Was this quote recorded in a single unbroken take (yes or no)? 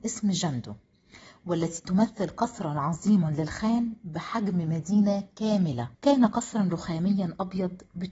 no